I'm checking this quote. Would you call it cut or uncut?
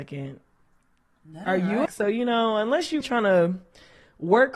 cut